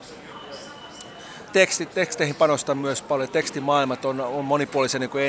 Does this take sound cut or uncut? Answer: cut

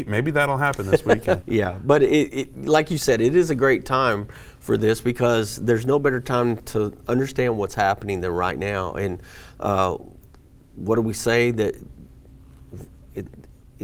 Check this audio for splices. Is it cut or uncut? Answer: cut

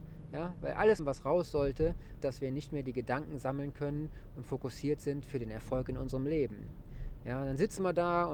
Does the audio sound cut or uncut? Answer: cut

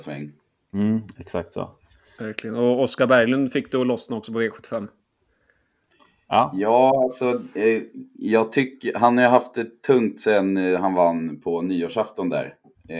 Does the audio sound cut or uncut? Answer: uncut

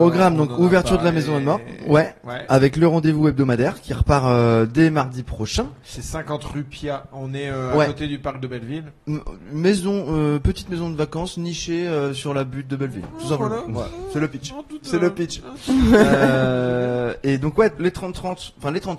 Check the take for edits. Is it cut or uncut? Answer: cut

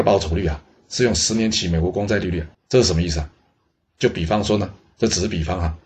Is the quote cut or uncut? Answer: cut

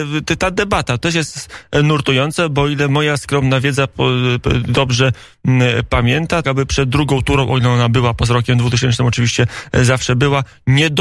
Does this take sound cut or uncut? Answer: cut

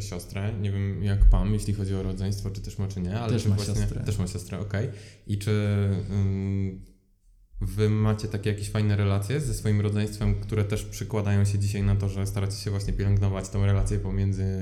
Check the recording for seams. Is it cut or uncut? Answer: uncut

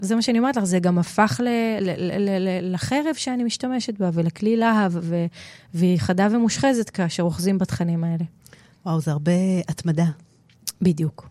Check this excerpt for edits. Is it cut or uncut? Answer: uncut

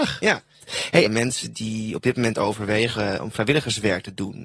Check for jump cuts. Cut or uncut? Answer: cut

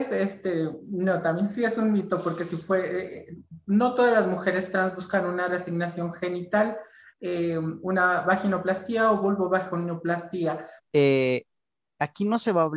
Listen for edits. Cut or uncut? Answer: cut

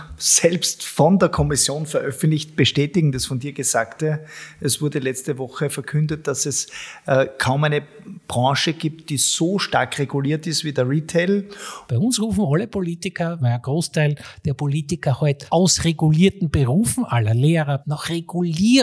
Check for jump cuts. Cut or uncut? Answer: cut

